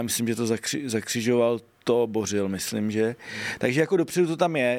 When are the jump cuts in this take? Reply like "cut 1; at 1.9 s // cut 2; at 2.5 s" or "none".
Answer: none